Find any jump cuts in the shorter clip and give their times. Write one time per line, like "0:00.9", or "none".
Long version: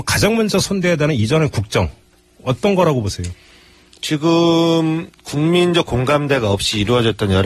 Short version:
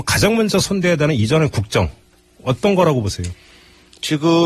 none